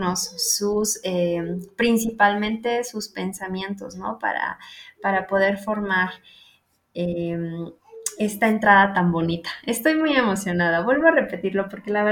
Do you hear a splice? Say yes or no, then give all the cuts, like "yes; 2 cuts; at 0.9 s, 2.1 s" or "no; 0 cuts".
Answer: no; 0 cuts